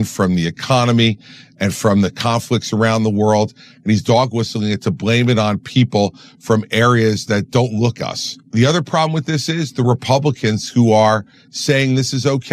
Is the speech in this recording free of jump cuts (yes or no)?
no